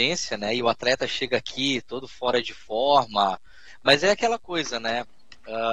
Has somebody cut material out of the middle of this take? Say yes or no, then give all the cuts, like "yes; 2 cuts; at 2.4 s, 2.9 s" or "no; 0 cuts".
no; 0 cuts